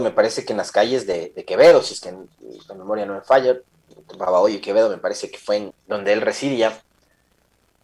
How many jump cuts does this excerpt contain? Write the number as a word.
one